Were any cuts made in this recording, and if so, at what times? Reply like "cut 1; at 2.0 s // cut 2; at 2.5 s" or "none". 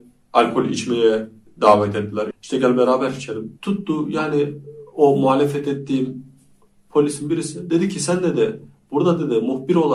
cut 1; at 2.3 s // cut 2; at 3.6 s